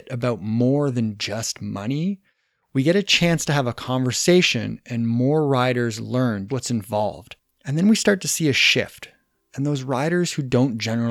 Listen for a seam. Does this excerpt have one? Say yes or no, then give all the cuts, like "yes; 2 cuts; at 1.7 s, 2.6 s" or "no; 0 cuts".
yes; 1 cut; at 6.5 s